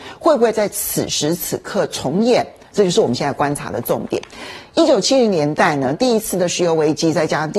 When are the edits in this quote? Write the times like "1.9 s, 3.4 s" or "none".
5.9 s